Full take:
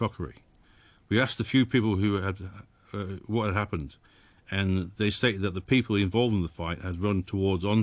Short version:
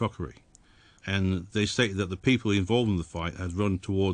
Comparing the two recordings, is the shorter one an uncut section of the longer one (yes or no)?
no